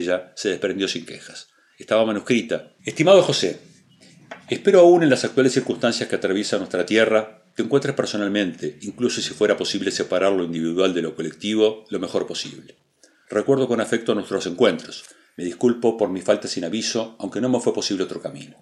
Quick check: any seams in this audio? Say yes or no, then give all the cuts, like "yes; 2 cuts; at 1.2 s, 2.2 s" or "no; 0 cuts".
yes; 1 cut; at 2.8 s